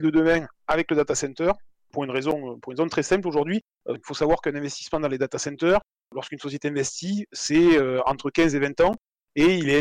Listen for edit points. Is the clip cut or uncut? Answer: cut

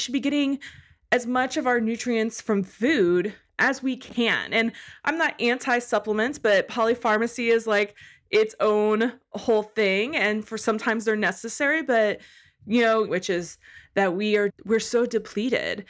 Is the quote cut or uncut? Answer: cut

